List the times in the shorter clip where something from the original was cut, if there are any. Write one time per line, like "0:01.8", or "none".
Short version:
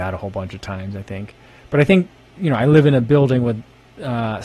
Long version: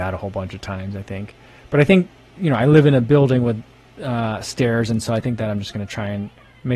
none